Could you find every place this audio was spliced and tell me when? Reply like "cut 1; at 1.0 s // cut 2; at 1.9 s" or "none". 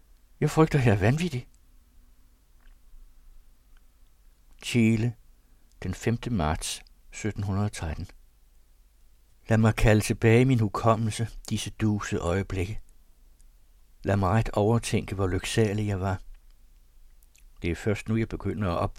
none